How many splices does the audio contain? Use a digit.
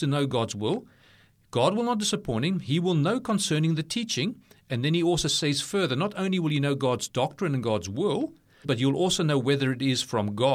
1